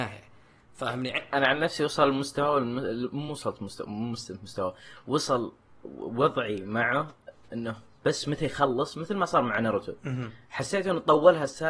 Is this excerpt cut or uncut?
uncut